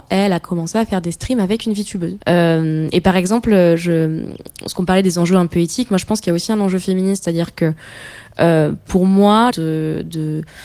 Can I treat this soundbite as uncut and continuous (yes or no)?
no